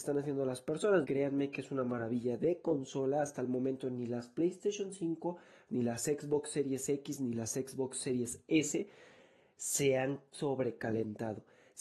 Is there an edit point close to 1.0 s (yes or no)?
yes